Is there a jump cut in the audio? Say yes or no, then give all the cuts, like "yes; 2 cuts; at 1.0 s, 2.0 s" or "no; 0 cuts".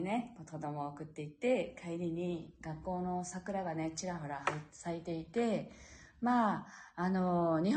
no; 0 cuts